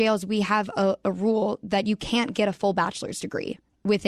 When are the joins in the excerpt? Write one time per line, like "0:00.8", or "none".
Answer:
none